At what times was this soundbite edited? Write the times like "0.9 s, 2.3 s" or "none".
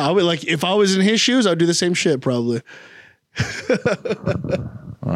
none